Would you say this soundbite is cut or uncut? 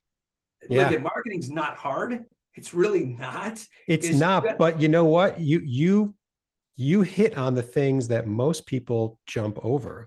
uncut